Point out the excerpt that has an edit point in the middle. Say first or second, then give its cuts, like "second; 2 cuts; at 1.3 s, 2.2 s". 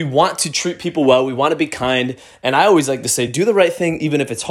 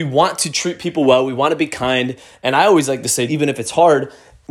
second; 1 cut; at 3.3 s